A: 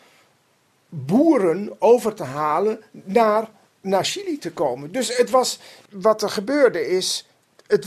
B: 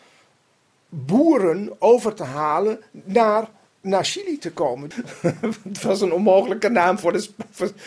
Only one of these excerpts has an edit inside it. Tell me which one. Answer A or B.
B